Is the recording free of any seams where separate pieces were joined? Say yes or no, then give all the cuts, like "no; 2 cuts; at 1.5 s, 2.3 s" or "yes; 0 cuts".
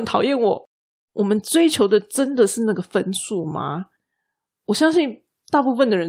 no; 1 cut; at 0.9 s